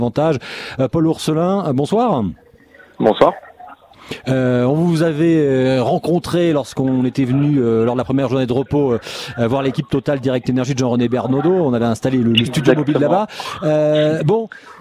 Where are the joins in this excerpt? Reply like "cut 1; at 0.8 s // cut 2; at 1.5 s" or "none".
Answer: none